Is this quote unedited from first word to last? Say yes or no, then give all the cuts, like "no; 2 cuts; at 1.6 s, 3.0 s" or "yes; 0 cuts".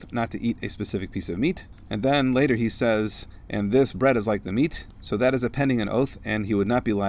yes; 0 cuts